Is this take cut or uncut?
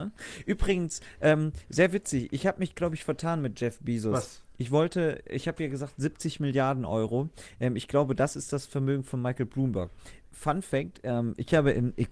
uncut